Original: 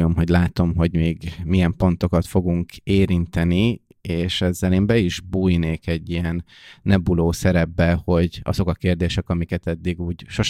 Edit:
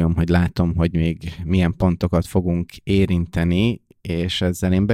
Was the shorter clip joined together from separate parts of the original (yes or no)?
no